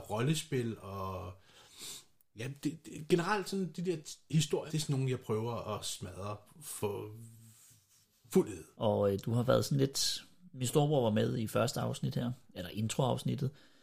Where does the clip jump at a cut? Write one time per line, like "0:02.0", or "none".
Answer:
0:04.7
0:08.7